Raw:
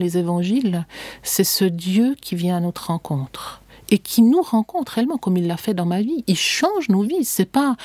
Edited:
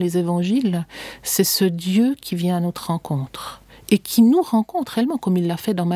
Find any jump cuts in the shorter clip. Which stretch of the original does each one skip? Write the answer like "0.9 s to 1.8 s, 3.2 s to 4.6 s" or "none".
none